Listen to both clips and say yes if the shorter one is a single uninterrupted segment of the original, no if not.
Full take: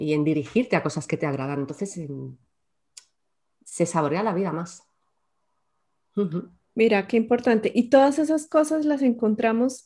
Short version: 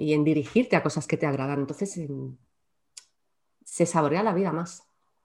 yes